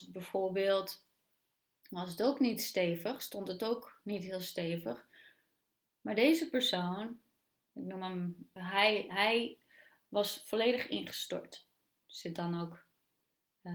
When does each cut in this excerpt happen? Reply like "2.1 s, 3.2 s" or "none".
8.6 s